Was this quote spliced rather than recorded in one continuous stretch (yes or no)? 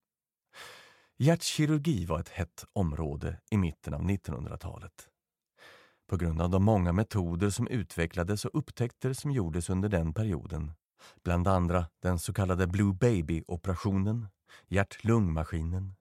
no